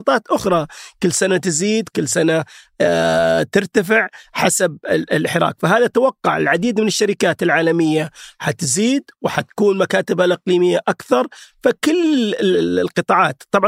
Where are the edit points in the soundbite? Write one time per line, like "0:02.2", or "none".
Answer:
0:11.5